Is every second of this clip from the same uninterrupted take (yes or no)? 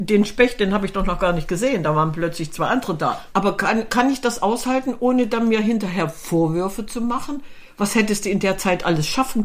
no